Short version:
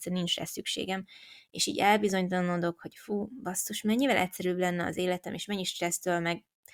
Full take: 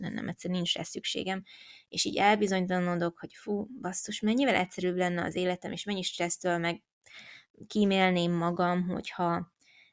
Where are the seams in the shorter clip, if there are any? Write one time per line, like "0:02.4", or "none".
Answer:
none

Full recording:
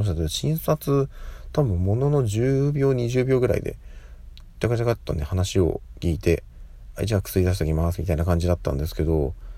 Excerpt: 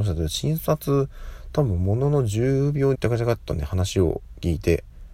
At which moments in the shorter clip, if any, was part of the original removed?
0:02.9

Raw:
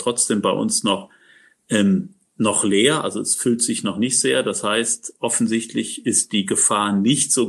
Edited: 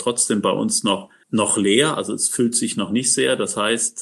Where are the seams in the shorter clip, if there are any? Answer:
0:01.2

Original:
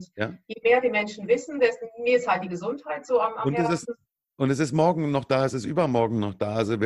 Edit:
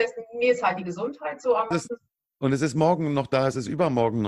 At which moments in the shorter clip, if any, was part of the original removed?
0:01.7

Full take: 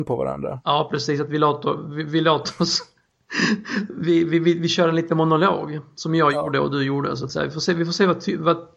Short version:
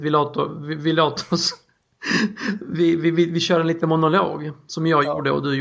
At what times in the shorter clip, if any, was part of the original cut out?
none

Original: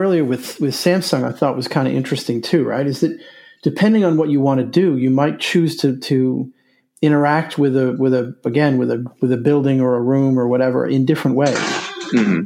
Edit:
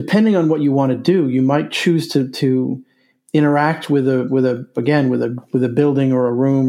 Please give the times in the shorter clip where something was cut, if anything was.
none

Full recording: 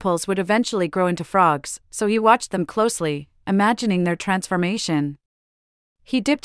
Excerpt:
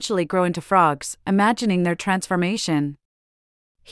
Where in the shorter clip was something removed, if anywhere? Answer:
0:01.2

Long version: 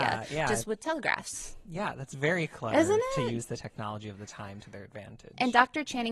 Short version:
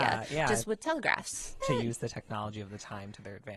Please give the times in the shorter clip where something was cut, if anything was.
0:01.6

